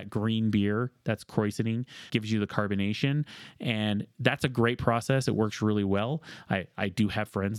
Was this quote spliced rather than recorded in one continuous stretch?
yes; 1 cut; at 2.1 s

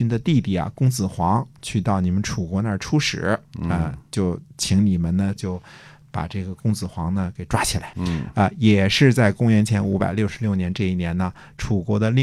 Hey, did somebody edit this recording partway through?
yes; 2 cuts; at 5.4 s, 7.9 s

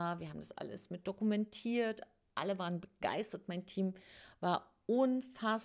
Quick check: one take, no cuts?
yes; 0 cuts

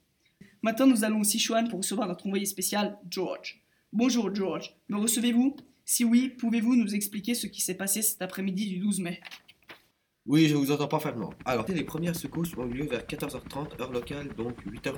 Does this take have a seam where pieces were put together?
yes; 1 cut; at 11.7 s

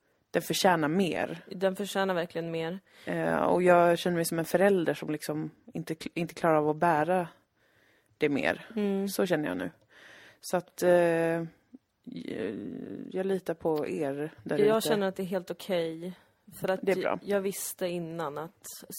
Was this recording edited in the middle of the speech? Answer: no; 0 cuts

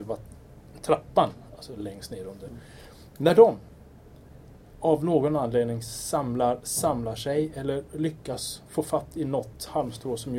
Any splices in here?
no; 0 cuts

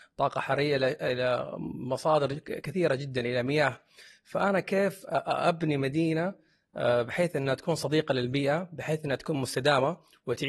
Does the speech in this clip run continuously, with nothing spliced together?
yes; 0 cuts

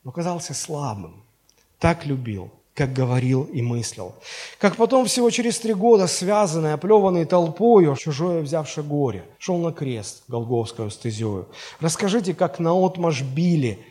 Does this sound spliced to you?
yes; 2 cuts; at 8.0 s, 9.3 s

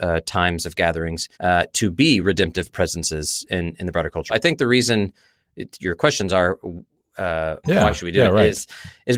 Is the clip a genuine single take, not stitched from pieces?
no; 3 cuts; at 1.3 s, 4.3 s, 7.6 s

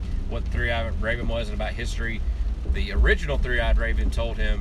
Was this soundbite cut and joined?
no; 0 cuts

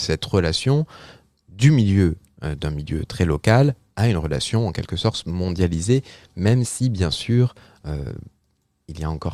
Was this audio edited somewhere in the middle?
no; 0 cuts

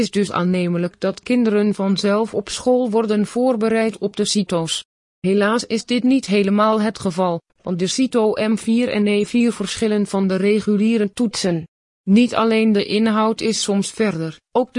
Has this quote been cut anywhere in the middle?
no; 0 cuts

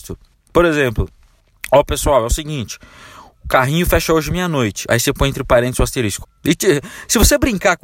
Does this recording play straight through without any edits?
no; 1 cut; at 6.2 s

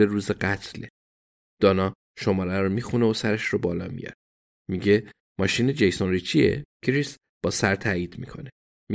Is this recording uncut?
no; 1 cut; at 6.7 s

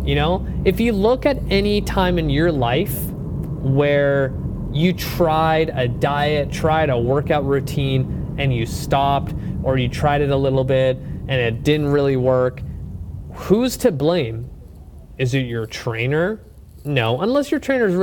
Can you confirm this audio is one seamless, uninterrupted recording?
yes; 0 cuts

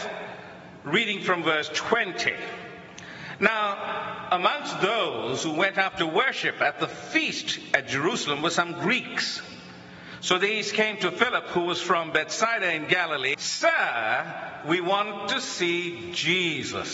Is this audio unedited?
no; 1 cut; at 13.3 s

